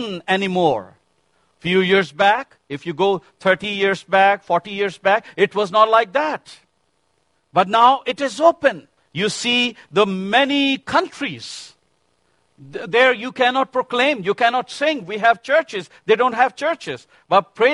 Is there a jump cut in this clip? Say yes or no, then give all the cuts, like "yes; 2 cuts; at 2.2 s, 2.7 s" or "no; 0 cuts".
yes; 1 cut; at 9.0 s